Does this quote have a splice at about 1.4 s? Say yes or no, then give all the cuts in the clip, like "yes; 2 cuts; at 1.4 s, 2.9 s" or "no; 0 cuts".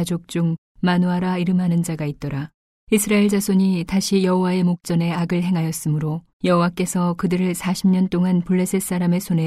no; 2 cuts; at 2.8 s, 6.3 s